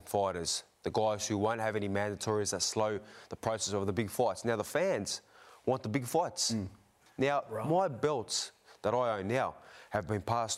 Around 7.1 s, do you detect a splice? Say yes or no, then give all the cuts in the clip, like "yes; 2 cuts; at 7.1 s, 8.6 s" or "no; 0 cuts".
yes; 1 cut; at 7.1 s